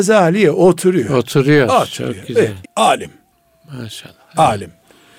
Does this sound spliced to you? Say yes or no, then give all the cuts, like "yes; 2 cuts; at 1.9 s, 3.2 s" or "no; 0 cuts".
yes; 1 cut; at 2.6 s